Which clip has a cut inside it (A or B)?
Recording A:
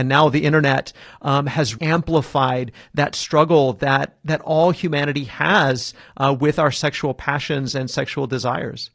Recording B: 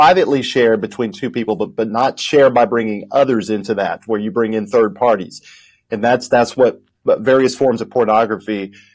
A